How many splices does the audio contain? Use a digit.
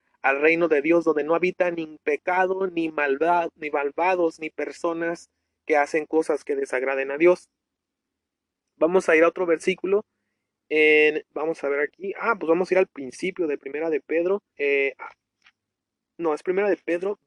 2